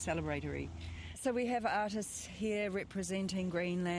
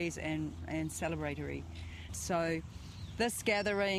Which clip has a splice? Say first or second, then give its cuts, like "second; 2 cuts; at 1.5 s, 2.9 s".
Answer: second; 1 cut; at 2.1 s